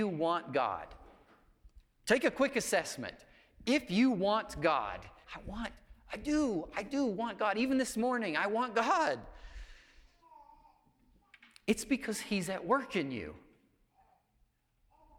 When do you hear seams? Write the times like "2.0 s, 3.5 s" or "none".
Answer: 5.2 s